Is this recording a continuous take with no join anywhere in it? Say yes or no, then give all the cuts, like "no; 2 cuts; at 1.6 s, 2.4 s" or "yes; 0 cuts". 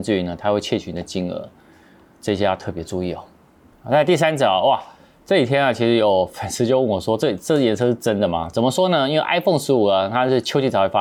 yes; 0 cuts